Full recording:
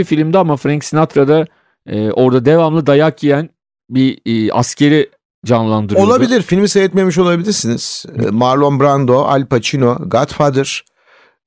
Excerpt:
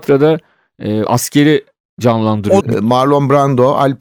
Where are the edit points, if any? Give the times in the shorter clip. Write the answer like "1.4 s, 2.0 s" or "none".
1.1 s, 2.6 s